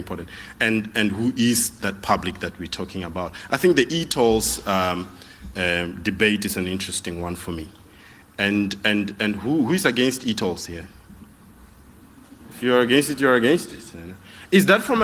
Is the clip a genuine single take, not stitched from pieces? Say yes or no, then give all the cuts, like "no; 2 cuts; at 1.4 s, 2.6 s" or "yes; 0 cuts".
no; 1 cut; at 12.4 s